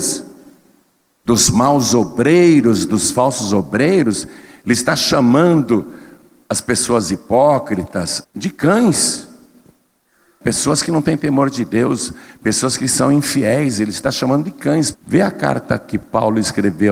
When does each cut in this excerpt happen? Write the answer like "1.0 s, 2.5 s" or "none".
8.2 s, 14.9 s